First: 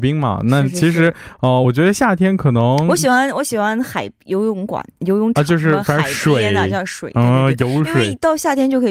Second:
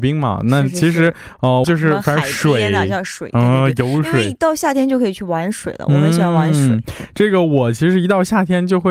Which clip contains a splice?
second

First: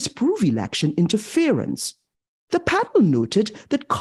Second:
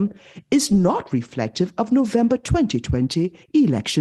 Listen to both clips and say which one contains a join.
first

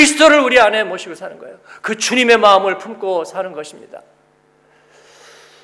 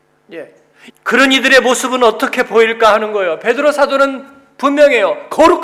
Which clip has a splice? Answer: second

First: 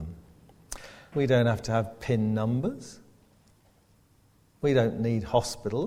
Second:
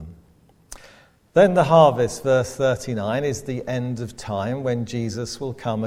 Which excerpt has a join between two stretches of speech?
first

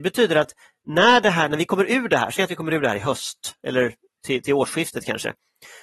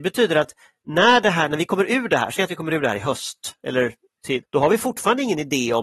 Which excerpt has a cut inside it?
second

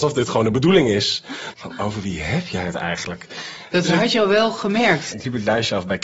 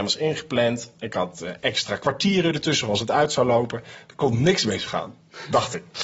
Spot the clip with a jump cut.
first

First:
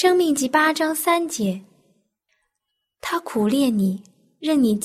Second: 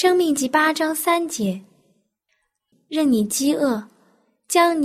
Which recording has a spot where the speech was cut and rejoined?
second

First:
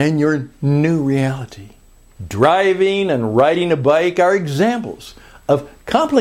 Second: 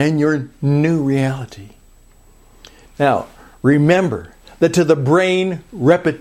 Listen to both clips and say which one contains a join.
first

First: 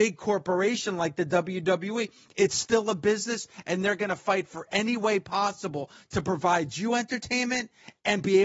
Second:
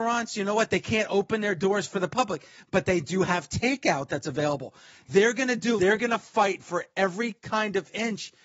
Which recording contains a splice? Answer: second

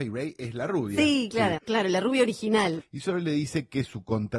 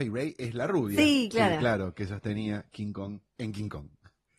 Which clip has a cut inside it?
first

